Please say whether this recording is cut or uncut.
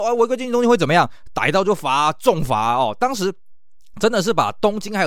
uncut